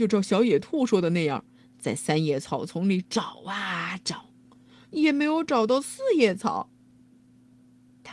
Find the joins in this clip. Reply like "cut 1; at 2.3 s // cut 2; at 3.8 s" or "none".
cut 1; at 4.8 s